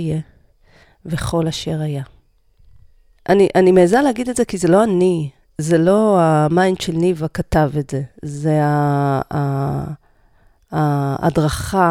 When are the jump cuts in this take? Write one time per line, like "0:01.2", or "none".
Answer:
0:03.2